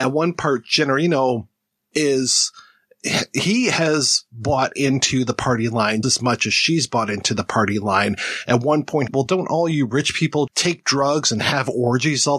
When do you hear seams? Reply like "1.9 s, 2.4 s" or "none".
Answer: 6.0 s, 9.1 s, 10.5 s

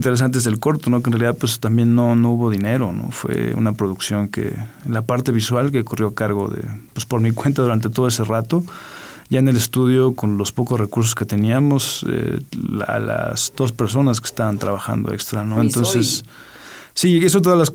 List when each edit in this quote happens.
15.6 s

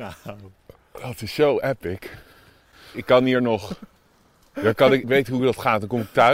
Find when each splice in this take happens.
2.9 s, 5.0 s

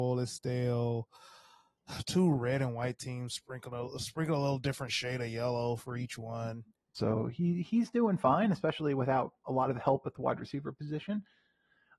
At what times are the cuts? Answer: 6.9 s

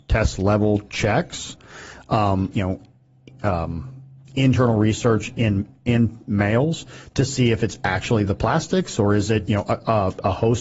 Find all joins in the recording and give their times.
2.5 s

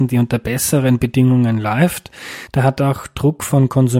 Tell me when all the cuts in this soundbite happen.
2.5 s

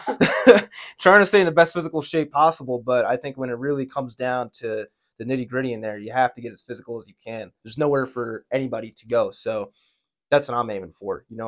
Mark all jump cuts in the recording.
7.6 s

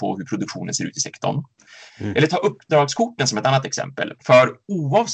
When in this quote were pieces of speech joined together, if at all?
1.9 s, 4.2 s

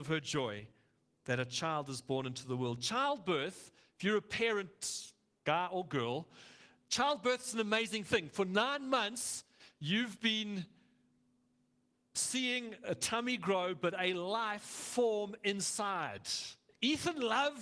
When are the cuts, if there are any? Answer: 16.7 s

